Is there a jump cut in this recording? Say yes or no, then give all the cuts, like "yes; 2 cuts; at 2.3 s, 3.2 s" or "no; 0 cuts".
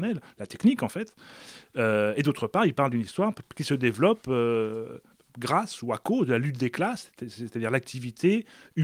no; 0 cuts